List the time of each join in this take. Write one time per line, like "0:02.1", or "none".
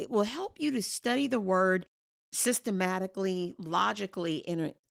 none